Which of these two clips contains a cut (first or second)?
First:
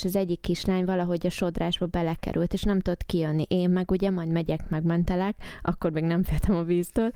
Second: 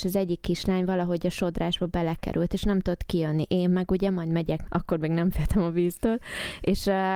second